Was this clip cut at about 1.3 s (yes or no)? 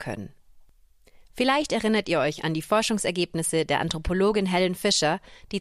no